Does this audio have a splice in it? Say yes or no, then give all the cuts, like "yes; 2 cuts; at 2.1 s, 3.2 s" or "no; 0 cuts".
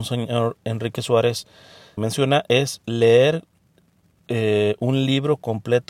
yes; 1 cut; at 2.0 s